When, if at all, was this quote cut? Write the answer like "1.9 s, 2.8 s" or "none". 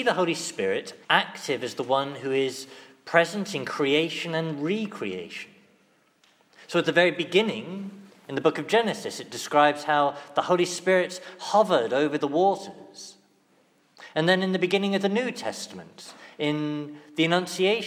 1.0 s